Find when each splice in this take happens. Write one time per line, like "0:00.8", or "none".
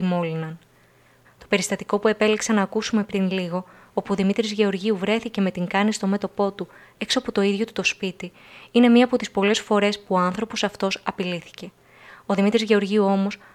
0:01.2